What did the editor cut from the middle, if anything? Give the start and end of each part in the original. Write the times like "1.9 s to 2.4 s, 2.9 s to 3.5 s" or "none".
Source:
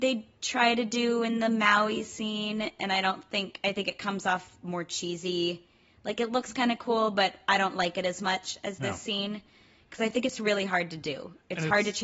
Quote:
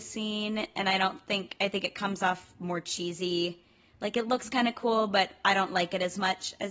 none